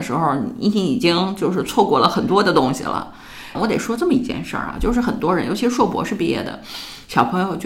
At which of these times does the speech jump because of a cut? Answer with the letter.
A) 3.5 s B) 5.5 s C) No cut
A